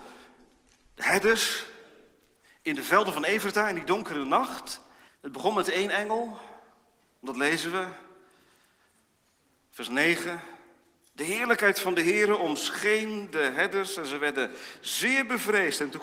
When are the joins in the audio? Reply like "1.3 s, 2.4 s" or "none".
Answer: 5.1 s